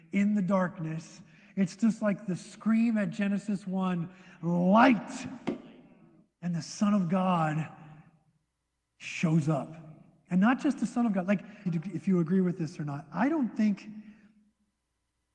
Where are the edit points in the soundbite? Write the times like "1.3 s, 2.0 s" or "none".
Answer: 11.7 s